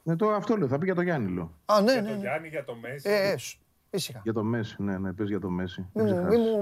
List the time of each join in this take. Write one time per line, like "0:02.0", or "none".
none